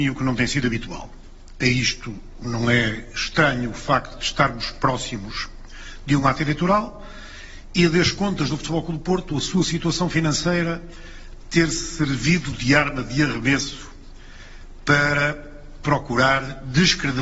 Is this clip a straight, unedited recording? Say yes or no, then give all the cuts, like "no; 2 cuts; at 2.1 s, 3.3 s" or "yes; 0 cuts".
yes; 0 cuts